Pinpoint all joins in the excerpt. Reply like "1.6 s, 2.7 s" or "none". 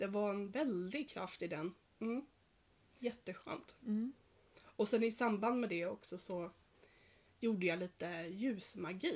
1.8 s

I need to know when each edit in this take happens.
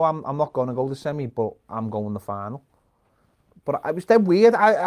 none

